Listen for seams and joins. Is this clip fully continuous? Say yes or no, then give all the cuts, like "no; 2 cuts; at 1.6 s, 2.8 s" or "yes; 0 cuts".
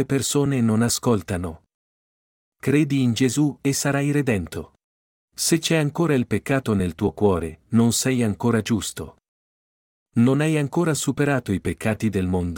no; 1 cut; at 5.3 s